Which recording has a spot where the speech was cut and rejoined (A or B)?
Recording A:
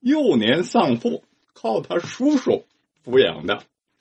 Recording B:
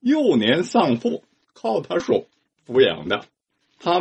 B